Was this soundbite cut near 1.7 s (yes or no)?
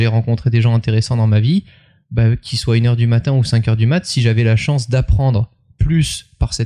no